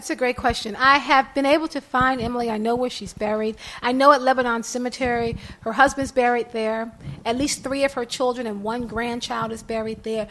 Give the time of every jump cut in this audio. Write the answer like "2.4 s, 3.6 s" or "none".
none